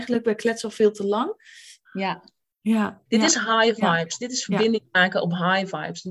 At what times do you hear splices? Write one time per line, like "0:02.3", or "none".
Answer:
0:01.8
0:03.1